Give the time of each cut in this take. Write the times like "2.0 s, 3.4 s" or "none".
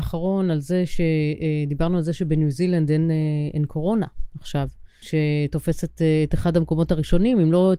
5.0 s